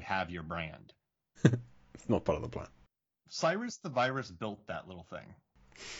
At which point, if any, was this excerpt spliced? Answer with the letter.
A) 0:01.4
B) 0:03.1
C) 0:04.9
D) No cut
A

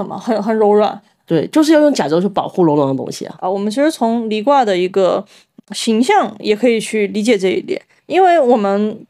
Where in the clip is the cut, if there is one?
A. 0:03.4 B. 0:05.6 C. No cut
A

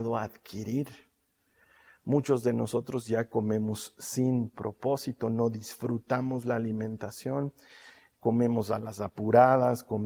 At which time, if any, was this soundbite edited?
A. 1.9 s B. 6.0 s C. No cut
C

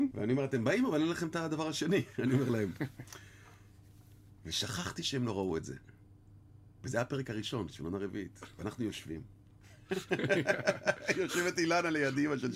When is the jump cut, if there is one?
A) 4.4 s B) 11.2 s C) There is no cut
C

